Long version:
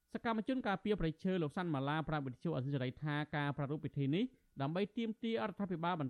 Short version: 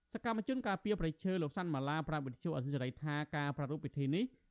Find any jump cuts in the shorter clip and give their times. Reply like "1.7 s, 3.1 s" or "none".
none